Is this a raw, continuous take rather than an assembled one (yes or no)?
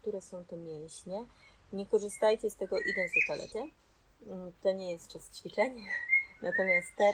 no